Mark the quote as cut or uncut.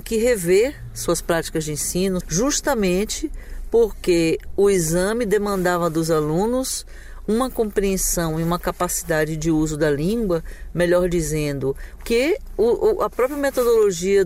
cut